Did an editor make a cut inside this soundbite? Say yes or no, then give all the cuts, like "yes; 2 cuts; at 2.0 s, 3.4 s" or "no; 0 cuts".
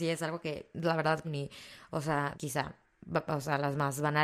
yes; 2 cuts; at 1.2 s, 2.3 s